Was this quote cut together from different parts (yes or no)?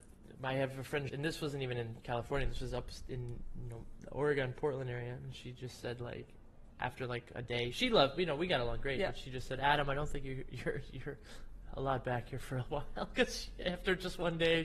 yes